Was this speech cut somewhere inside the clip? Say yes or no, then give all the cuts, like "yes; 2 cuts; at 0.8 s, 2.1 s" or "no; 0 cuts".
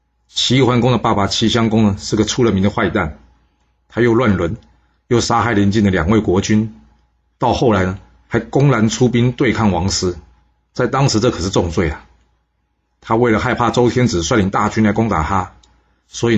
no; 0 cuts